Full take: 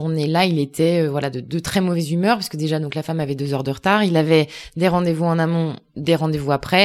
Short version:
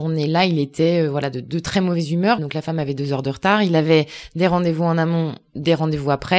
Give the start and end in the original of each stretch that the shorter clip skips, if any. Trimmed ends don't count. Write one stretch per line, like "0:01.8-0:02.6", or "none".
0:02.4-0:02.8